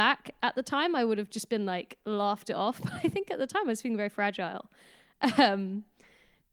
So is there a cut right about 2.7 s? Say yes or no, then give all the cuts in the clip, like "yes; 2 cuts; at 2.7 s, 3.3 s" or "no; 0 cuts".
no; 0 cuts